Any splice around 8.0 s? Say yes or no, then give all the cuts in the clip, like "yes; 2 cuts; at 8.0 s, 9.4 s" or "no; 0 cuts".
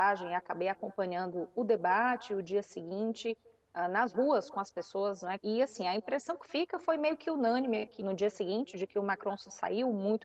yes; 2 cuts; at 5.4 s, 8.0 s